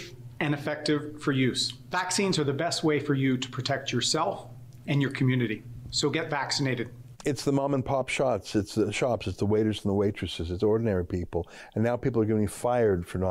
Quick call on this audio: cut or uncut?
cut